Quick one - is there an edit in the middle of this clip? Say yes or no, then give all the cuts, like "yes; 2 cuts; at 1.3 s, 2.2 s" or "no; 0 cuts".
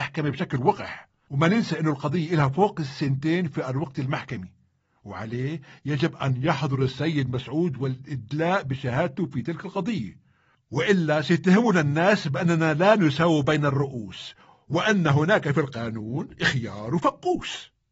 no; 0 cuts